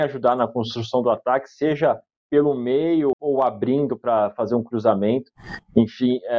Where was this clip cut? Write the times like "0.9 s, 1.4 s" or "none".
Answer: 3.1 s